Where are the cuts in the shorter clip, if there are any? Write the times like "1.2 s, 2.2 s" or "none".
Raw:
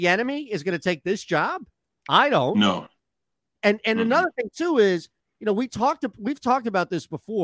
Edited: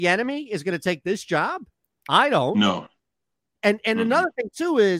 none